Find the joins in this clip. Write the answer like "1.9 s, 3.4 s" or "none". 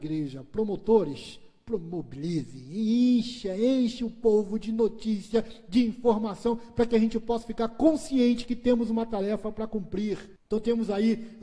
10.5 s

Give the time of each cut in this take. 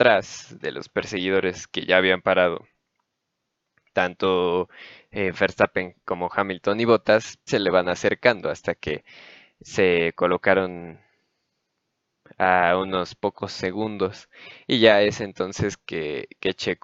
7.5 s

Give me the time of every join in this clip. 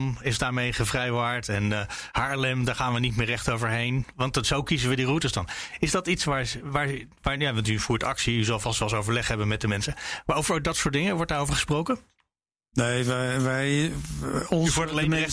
none

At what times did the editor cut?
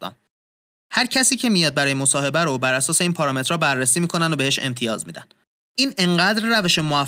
5.6 s

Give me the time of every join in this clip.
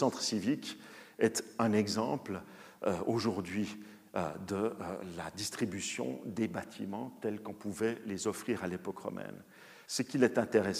9.9 s

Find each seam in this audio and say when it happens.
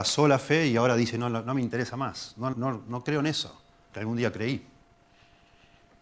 2.5 s, 3.9 s

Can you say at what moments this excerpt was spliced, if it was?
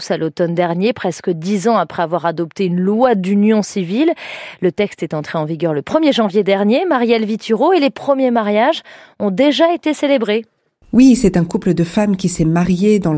none

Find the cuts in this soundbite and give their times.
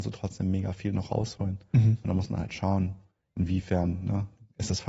none

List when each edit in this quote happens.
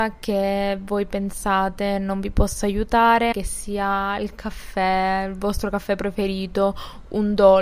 3.3 s

